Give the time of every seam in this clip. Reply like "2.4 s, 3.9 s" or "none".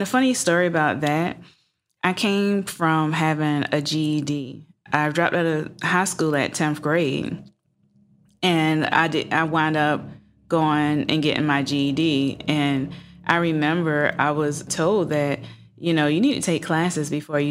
14.7 s